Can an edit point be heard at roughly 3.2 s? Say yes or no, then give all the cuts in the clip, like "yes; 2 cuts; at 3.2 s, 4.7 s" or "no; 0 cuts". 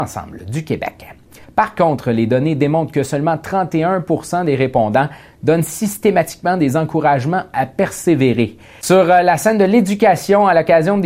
no; 2 cuts; at 1.4 s, 8.8 s